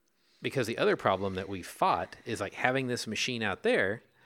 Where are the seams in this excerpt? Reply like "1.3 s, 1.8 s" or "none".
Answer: none

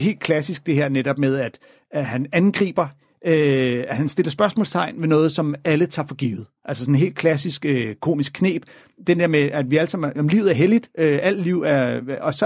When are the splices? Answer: none

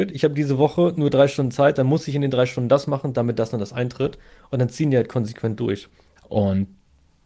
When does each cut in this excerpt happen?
6.2 s

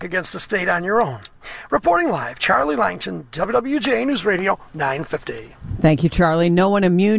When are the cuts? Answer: none

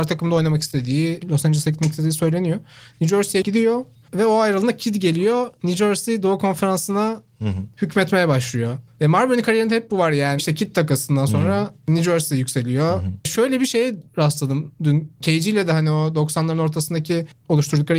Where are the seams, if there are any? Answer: 1.2 s, 4.0 s, 10.4 s

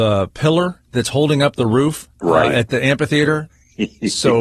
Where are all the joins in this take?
2.1 s, 3.5 s

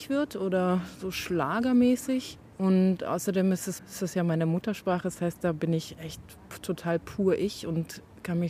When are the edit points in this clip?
3.8 s

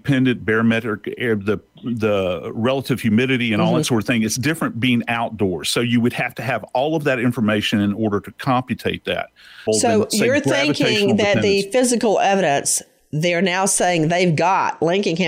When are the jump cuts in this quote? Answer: 9.7 s

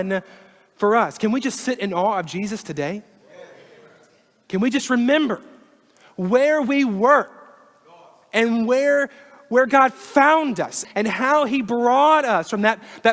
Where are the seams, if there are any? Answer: 10.8 s

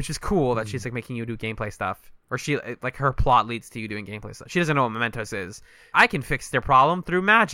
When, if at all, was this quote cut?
5.9 s

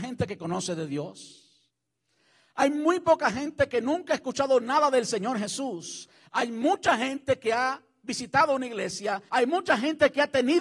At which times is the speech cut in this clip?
6.3 s, 9.3 s

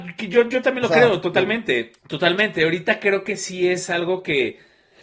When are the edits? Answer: 2.0 s

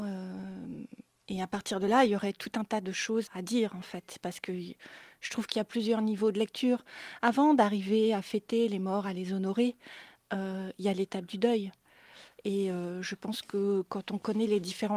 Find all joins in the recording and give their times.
3.3 s

